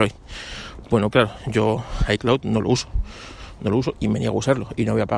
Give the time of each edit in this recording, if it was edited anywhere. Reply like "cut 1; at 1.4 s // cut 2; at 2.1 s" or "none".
cut 1; at 1.1 s